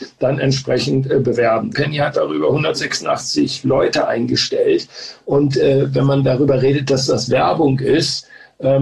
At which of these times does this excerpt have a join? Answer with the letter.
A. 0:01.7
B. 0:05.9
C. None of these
A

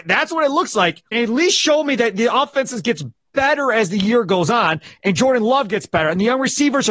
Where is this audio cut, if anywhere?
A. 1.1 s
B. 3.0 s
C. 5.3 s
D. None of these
A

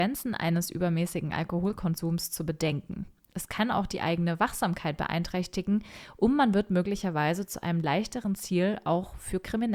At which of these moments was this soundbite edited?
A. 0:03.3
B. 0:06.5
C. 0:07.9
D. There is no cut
A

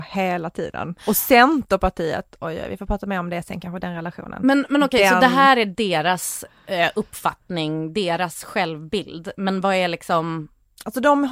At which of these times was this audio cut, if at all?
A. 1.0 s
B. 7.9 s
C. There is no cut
A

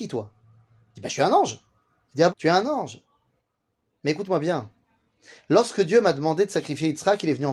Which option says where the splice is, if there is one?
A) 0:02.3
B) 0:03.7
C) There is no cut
A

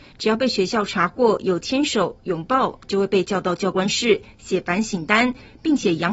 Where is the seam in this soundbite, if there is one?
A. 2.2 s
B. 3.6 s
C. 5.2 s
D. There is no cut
D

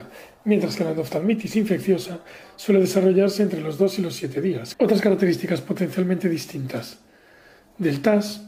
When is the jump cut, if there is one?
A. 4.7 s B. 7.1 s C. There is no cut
A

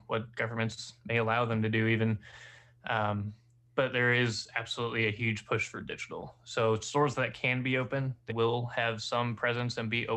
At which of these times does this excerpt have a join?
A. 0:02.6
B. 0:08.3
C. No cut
B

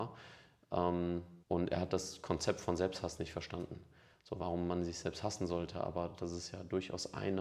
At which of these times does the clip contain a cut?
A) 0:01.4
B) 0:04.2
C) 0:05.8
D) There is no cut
A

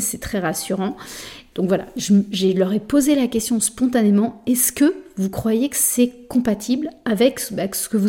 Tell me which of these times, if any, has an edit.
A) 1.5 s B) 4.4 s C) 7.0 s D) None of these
A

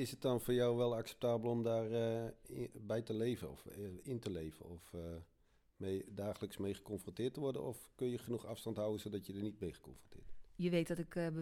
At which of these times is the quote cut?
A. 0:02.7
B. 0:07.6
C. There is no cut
C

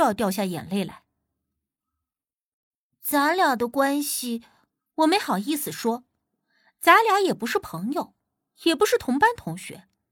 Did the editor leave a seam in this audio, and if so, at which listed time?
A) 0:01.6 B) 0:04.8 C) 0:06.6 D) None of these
B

